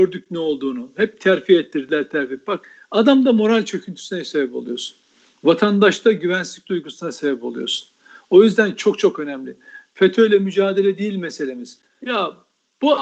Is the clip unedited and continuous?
no; 1 cut; at 11.8 s

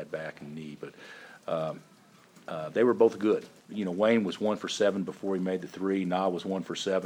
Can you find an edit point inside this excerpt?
yes; 1 cut; at 3.6 s

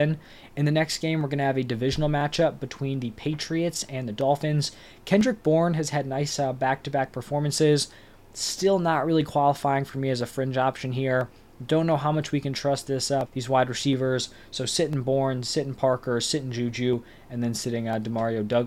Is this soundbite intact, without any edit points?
no; 1 cut; at 13.3 s

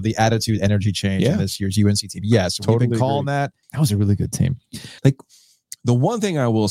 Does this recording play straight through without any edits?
no; 2 cuts; at 3.6 s, 5.0 s

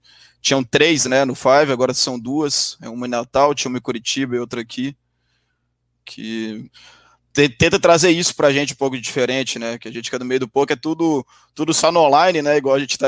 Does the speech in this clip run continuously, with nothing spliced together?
yes; 0 cuts

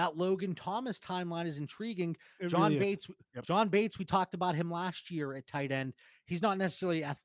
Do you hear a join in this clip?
no; 0 cuts

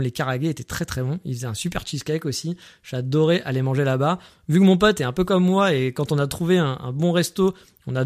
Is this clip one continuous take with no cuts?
yes; 0 cuts

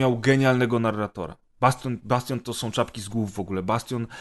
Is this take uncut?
yes; 0 cuts

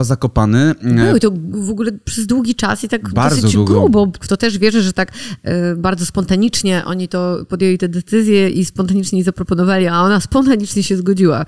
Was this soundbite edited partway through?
yes; 1 cut; at 4.2 s

